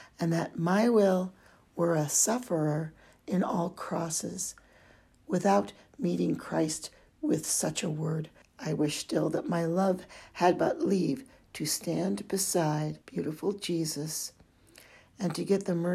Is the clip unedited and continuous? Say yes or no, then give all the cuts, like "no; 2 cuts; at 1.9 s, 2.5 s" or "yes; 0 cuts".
no; 2 cuts; at 8.4 s, 13.0 s